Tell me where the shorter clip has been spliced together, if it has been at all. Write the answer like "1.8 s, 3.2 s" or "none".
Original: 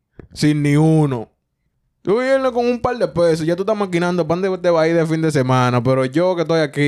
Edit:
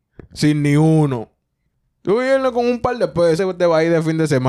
3.4 s